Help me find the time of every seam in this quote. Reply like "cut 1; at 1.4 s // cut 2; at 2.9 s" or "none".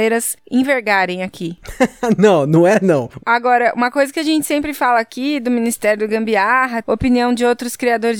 cut 1; at 3.2 s // cut 2; at 6.8 s